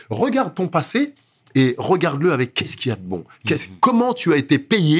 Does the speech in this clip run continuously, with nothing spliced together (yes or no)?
yes